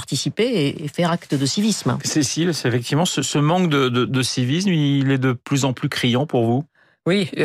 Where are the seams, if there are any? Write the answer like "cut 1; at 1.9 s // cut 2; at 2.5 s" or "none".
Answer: cut 1; at 4.1 s